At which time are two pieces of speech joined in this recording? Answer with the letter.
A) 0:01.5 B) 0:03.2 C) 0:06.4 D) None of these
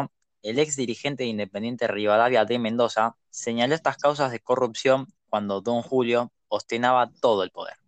B